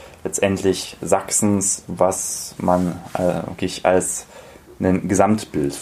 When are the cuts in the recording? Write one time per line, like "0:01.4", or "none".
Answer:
none

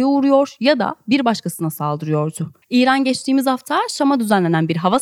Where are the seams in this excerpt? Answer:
0:02.6

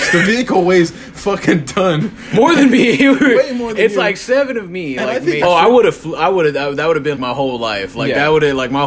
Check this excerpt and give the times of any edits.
0:05.4
0:07.1

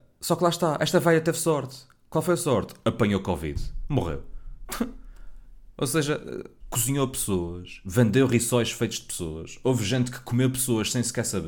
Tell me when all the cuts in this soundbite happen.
0:06.6

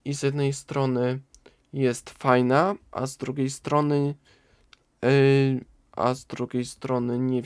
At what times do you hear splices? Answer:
none

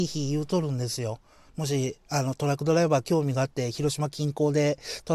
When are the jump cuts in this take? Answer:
0:01.5

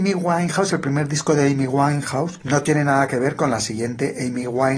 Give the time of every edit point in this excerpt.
0:02.4

